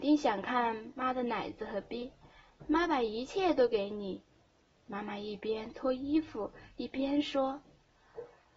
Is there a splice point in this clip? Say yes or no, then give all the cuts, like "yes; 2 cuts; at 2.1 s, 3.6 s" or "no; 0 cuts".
no; 0 cuts